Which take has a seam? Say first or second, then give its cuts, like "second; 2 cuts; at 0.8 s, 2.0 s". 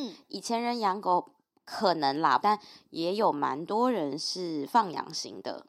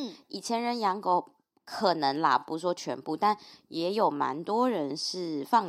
first; 1 cut; at 2.4 s